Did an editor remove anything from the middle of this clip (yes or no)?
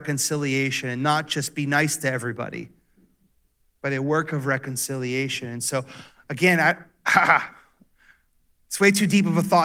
no